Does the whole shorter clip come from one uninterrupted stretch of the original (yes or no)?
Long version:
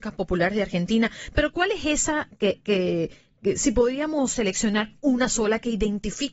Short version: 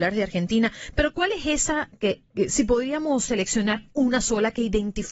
no